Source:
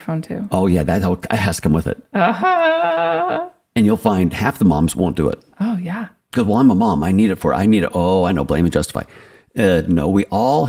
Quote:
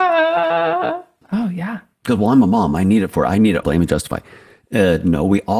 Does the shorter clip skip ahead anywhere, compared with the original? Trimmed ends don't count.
yes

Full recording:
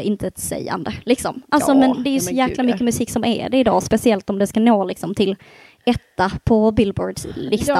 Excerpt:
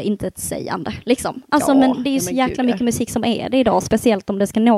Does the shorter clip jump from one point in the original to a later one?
no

